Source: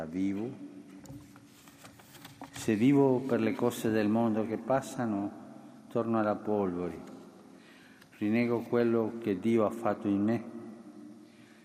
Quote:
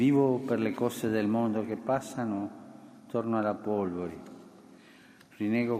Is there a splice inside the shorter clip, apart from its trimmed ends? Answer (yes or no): no